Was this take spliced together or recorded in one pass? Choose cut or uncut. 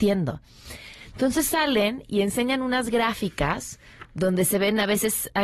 uncut